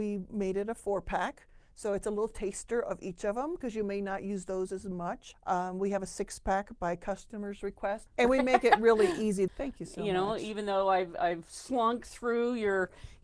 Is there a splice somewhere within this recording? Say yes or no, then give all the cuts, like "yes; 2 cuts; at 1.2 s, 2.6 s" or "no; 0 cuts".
yes; 2 cuts; at 8.1 s, 9.5 s